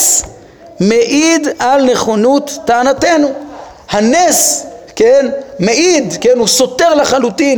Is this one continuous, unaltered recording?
yes; 0 cuts

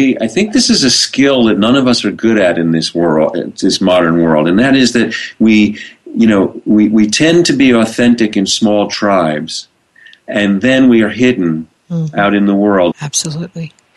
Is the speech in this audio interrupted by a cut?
yes; 1 cut; at 12.9 s

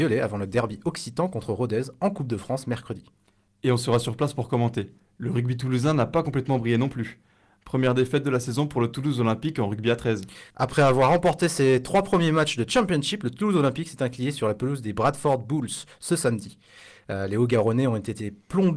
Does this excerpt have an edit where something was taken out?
no; 0 cuts

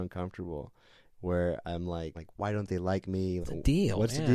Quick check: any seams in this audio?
yes; 2 cuts; at 2.1 s, 3.4 s

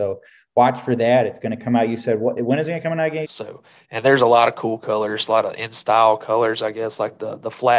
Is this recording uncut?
no; 1 cut; at 3.2 s

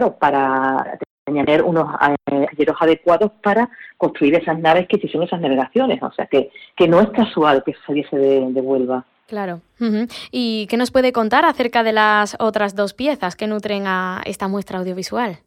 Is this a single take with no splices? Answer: yes; 0 cuts

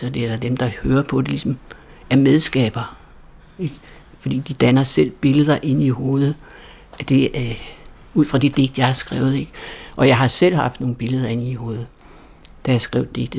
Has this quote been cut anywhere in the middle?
no; 0 cuts

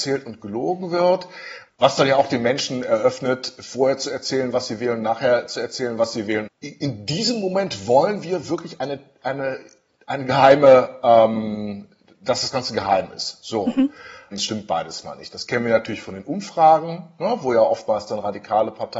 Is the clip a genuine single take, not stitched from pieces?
no; 3 cuts; at 1.7 s, 6.5 s, 14.3 s

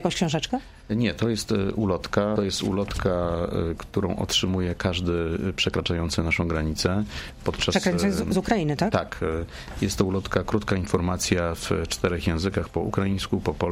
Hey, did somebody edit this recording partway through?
yes; 1 cut; at 2.4 s

